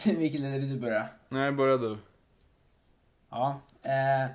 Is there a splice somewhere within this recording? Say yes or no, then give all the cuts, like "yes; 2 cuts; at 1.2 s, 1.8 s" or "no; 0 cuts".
no; 0 cuts